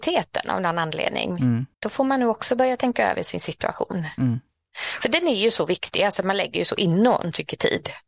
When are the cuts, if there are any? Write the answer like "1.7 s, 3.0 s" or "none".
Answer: 1.7 s